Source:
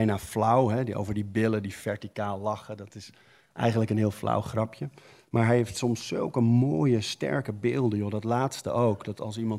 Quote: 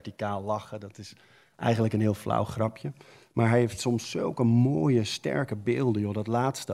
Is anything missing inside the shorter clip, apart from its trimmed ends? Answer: no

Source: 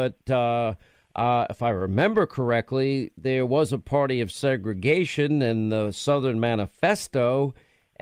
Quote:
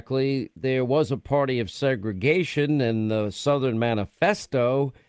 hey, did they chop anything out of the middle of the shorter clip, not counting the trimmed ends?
no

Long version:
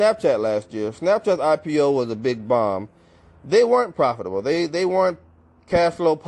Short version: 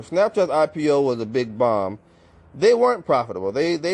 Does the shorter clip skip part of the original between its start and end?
no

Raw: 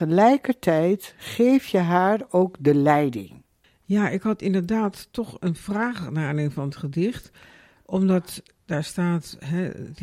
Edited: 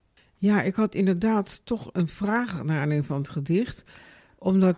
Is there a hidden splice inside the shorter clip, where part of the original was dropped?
no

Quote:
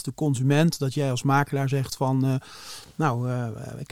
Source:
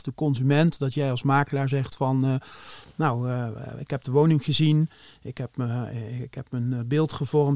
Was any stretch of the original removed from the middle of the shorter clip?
no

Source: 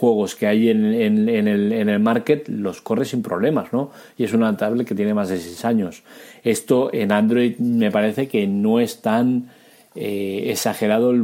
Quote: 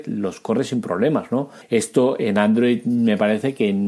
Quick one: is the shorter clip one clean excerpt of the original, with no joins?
no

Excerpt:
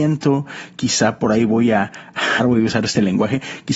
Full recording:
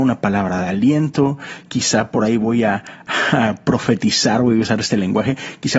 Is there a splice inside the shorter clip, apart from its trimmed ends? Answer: yes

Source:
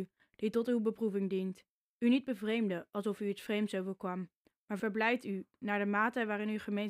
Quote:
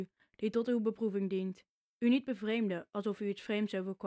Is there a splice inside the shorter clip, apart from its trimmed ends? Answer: no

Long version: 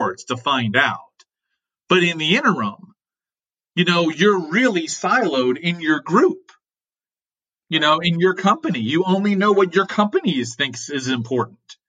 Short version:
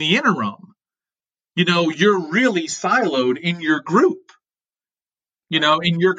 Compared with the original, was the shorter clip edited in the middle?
no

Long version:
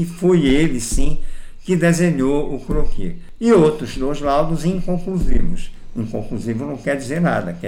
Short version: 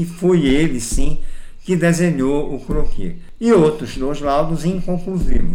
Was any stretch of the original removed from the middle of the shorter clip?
no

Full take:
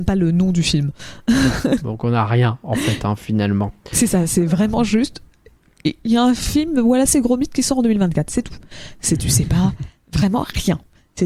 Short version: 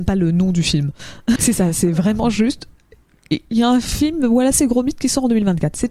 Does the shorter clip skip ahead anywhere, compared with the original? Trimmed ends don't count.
yes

